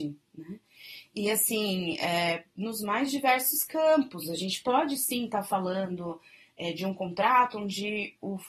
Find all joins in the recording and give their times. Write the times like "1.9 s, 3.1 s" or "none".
none